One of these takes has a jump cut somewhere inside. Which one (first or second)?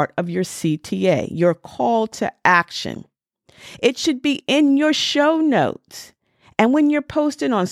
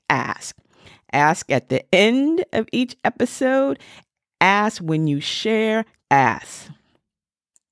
second